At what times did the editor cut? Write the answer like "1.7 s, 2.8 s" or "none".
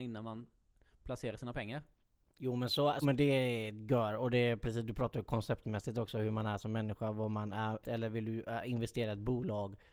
3.0 s, 7.8 s